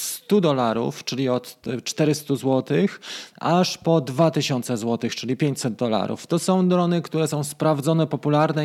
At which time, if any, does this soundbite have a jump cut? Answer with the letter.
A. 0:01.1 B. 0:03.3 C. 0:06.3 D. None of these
D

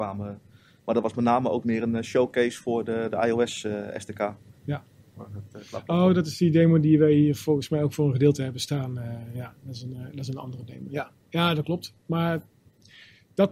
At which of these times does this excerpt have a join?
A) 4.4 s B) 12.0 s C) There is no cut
C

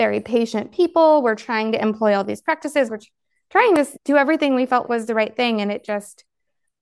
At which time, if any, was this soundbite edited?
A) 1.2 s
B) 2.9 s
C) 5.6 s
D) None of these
B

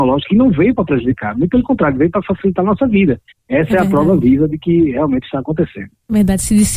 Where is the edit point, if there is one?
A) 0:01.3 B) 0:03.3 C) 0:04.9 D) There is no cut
B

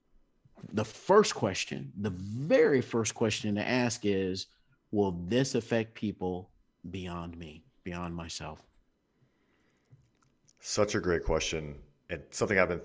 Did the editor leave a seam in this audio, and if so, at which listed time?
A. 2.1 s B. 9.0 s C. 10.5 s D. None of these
D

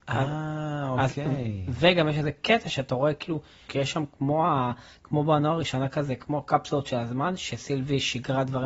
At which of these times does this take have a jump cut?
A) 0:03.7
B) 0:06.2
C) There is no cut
A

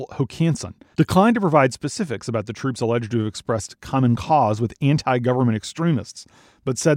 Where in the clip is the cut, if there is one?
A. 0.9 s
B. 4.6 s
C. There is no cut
A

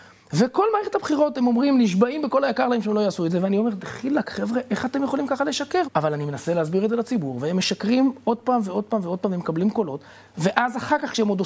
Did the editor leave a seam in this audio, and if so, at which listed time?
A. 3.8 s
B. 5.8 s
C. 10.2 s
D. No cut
B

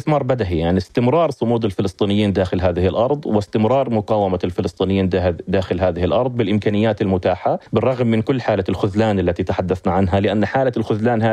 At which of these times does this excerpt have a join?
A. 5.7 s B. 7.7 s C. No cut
B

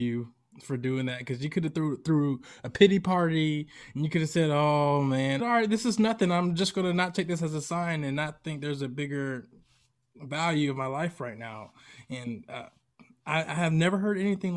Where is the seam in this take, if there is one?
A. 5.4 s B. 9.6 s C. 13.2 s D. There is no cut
A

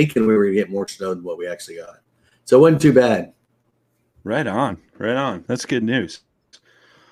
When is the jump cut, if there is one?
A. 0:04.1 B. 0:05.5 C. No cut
B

